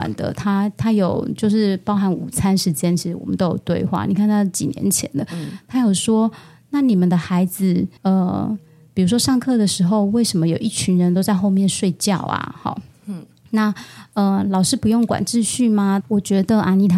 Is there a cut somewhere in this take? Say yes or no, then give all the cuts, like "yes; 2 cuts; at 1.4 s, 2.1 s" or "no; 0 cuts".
yes; 2 cuts; at 8.0 s, 16.0 s